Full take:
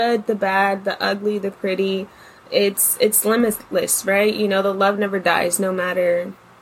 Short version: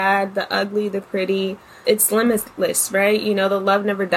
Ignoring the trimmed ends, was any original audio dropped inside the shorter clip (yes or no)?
yes